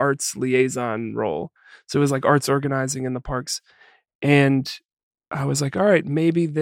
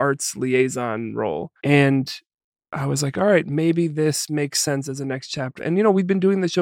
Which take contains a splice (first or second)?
second